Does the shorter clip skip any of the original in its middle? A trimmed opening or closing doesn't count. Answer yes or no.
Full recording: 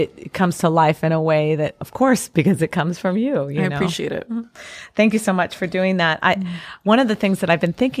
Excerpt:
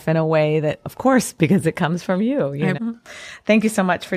yes